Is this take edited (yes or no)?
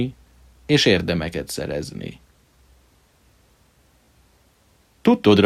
no